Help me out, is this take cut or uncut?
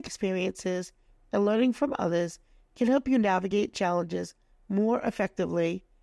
uncut